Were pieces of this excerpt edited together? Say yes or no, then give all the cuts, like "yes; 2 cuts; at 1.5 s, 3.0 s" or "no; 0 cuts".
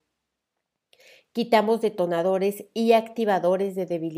no; 0 cuts